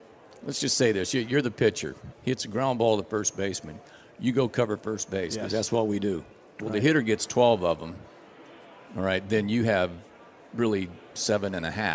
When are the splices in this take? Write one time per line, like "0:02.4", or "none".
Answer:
0:02.1
0:06.6